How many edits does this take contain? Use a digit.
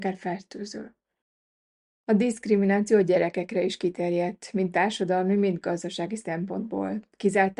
0